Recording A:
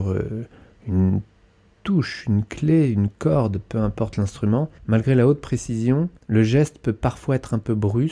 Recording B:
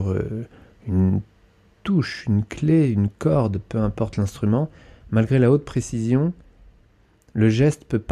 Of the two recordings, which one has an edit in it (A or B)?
A